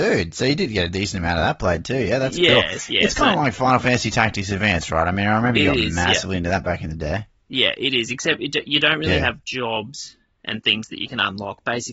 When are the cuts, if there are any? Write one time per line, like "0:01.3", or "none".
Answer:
none